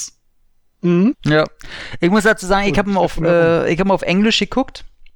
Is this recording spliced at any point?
yes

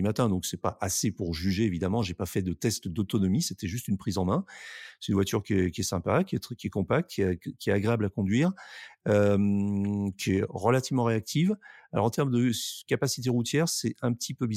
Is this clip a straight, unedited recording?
yes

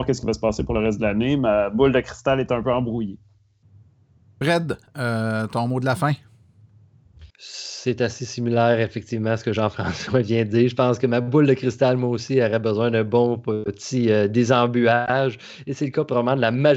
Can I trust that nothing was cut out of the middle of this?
no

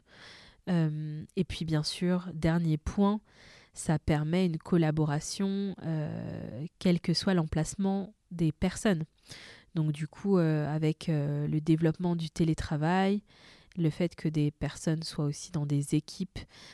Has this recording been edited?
no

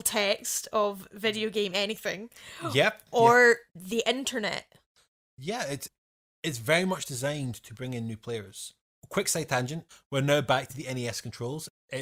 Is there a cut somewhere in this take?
no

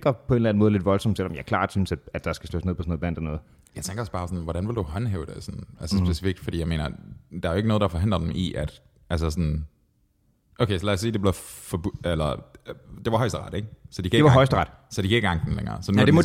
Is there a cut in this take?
no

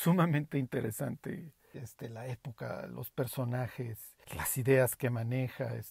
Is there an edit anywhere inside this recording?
yes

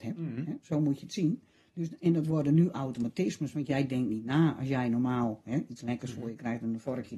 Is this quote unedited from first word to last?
yes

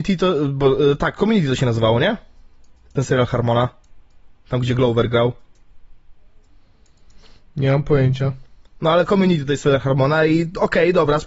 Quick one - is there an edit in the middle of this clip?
no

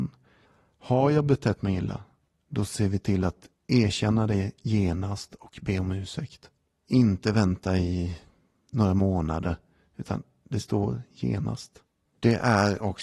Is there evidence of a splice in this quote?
no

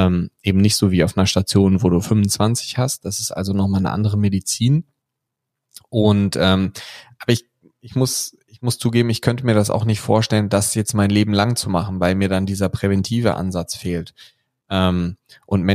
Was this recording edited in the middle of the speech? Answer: no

